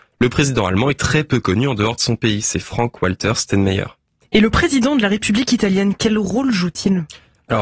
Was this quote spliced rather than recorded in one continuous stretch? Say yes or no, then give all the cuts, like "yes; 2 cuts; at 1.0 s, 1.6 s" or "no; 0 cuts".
yes; 1 cut; at 4.2 s